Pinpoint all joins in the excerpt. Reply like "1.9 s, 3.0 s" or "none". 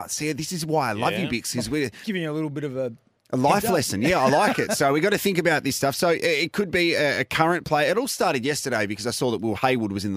2.0 s